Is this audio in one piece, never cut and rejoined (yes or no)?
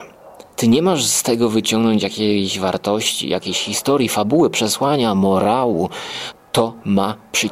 no